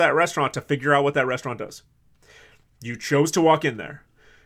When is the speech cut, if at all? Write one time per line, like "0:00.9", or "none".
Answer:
none